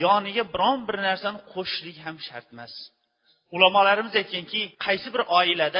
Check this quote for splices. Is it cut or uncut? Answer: cut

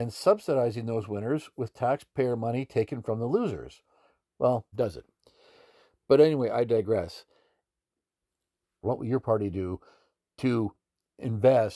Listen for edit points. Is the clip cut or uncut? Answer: cut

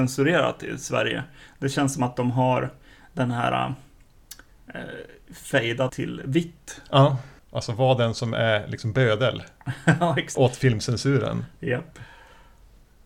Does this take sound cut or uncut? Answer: cut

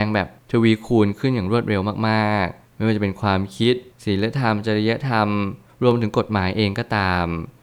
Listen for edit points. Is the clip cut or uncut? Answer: uncut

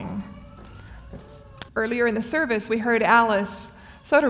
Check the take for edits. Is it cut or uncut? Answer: cut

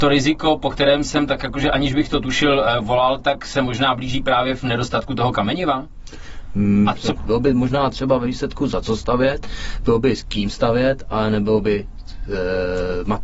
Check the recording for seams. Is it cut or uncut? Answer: cut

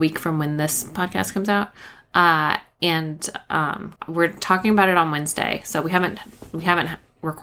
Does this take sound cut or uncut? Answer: cut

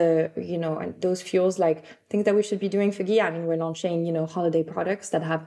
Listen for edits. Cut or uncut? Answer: uncut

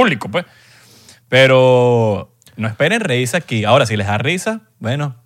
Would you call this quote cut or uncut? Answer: uncut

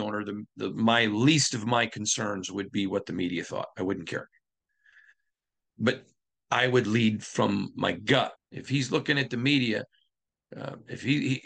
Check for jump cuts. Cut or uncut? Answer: cut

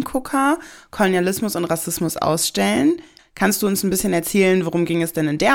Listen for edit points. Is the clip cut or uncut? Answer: cut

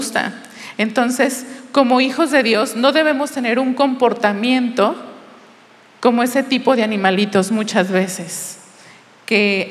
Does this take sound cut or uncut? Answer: uncut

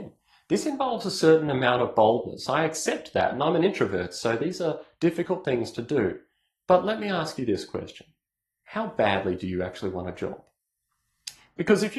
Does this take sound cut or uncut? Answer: uncut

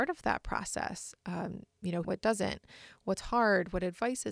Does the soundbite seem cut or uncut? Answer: cut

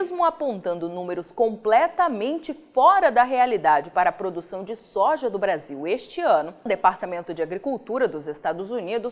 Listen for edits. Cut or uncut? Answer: cut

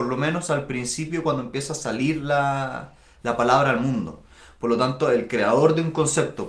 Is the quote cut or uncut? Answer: uncut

